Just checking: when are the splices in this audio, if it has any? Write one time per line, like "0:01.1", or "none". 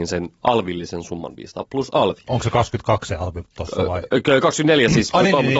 0:01.6